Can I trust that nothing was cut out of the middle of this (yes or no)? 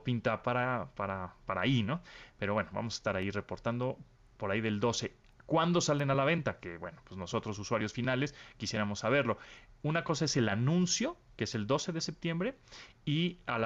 yes